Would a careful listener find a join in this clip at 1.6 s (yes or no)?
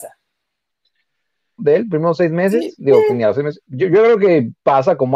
yes